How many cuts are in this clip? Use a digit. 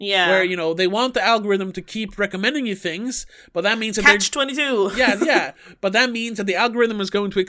0